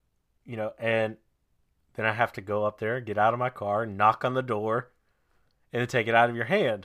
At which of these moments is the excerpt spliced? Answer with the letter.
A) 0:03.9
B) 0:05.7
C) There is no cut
C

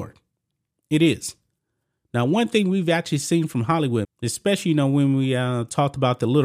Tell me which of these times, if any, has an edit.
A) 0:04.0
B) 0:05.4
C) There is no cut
A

